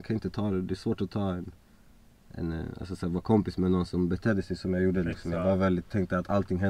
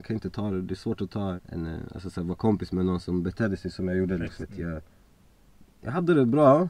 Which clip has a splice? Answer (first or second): second